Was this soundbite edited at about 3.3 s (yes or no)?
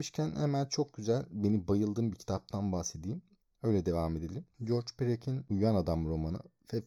no